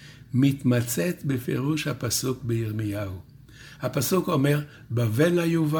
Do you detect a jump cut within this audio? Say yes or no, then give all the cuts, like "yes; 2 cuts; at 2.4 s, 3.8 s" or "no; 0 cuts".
no; 0 cuts